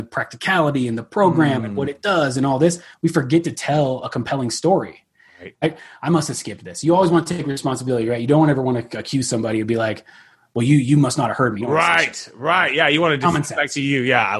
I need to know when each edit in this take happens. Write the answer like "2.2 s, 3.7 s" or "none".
5.5 s